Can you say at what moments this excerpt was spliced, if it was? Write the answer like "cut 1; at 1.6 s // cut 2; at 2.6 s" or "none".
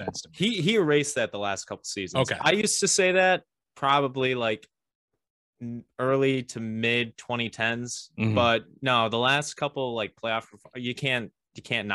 none